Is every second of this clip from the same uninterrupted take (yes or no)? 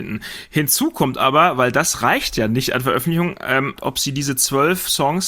no